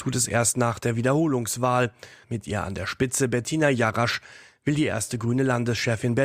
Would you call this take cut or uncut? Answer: cut